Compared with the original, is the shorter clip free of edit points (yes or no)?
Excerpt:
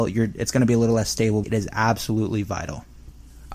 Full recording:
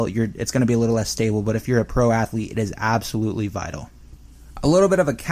no